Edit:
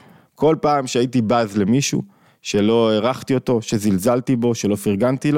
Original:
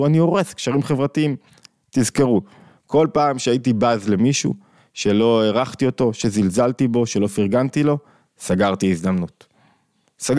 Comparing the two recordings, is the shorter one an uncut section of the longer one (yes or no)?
yes